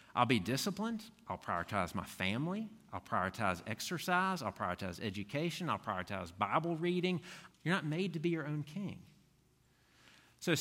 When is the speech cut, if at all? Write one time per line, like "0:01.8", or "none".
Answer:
0:07.5